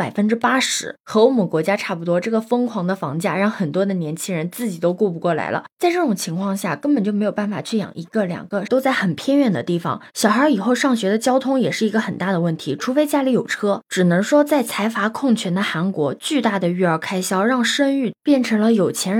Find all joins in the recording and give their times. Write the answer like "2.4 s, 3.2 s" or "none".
8.7 s